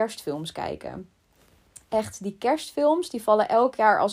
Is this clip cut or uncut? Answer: uncut